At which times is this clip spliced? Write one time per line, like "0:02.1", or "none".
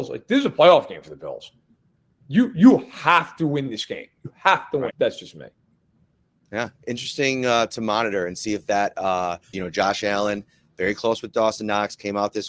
0:04.9
0:09.5